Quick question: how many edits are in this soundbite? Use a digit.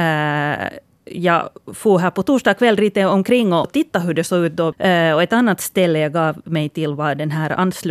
2